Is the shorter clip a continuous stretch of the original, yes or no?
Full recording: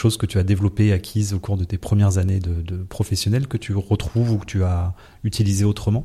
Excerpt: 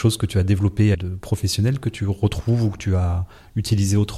no